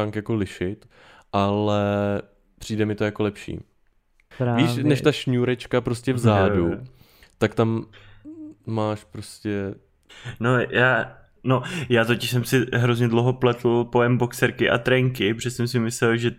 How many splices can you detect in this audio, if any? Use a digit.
2